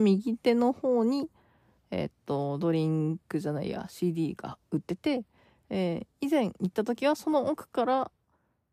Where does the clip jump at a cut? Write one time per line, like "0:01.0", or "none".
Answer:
none

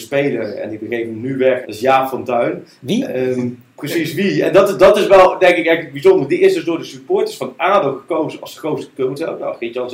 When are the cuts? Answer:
0:01.6

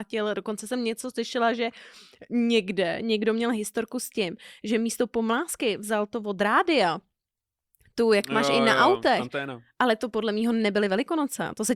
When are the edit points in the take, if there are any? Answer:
none

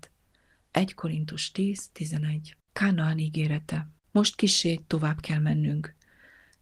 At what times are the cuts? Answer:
0:02.6
0:04.0

